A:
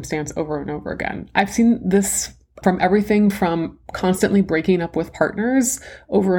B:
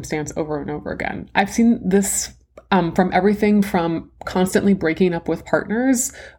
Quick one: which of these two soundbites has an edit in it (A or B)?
A